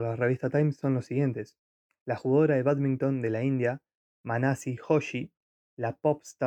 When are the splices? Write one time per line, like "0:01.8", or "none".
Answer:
none